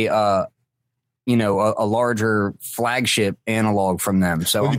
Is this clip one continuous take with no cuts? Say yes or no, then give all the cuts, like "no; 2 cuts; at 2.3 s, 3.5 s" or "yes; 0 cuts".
yes; 0 cuts